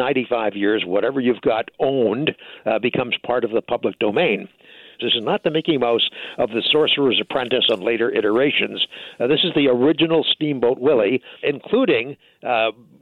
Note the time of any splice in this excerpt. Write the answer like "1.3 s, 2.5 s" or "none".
5.0 s, 11.4 s